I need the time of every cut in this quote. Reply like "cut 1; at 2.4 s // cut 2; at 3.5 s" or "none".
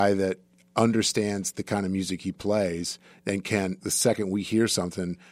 cut 1; at 3.8 s